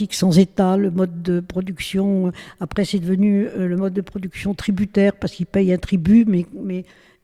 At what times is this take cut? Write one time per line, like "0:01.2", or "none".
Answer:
none